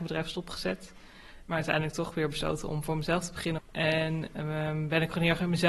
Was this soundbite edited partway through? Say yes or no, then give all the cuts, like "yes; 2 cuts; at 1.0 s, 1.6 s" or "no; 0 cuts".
yes; 2 cuts; at 1.5 s, 3.6 s